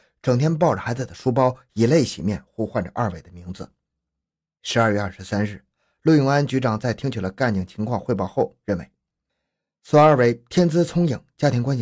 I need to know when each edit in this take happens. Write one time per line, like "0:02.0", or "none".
none